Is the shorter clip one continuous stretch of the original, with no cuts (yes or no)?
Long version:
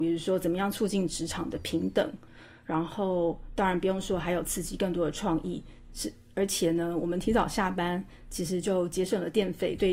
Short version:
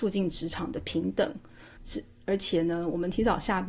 no